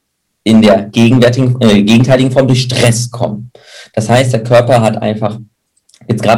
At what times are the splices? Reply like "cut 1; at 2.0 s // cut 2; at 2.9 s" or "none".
none